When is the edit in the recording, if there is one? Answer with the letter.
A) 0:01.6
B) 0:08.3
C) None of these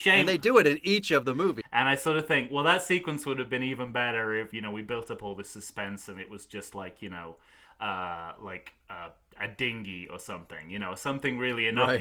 A